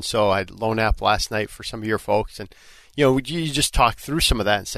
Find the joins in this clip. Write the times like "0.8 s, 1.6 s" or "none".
none